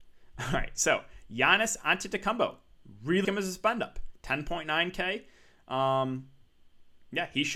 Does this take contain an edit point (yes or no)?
yes